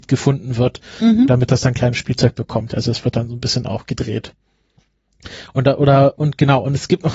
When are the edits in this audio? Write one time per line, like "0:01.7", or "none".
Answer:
none